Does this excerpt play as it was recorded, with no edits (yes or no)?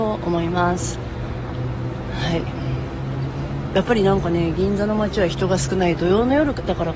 no